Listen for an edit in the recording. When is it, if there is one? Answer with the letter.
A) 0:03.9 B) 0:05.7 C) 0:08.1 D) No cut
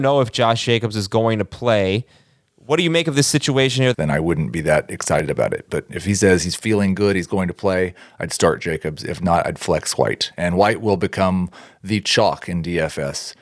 A